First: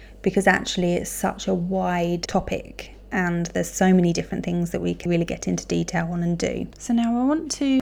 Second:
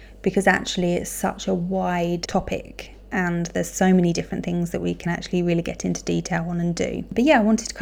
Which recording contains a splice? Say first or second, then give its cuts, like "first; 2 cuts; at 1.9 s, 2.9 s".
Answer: first; 2 cuts; at 5.1 s, 6.7 s